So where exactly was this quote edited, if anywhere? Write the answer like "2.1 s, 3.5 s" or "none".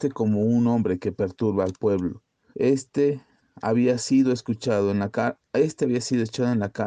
2.5 s